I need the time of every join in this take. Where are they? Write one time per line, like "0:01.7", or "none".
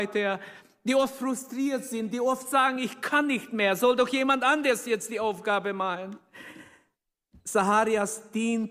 none

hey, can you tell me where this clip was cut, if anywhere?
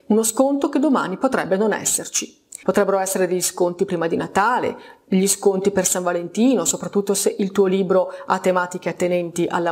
0:02.6

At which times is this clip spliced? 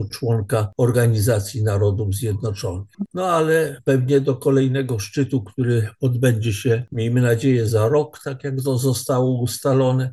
0:03.1

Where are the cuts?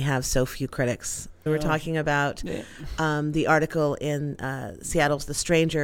0:01.5

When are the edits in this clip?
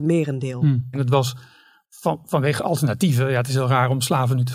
0:00.9

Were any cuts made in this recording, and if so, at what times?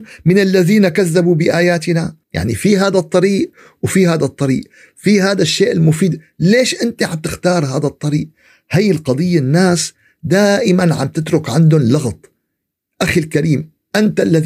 0:02.2

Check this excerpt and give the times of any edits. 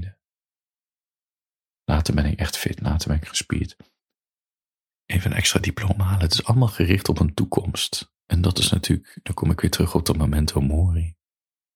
0:01.8

